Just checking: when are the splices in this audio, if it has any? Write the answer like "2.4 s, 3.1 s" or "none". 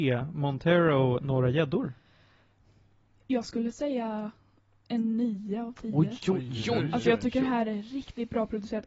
none